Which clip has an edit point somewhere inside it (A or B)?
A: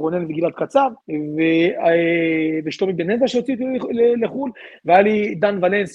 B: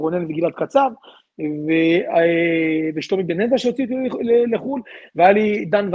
A